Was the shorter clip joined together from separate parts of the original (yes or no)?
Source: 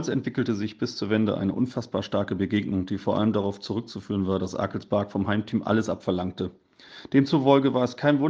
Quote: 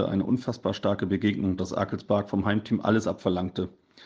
yes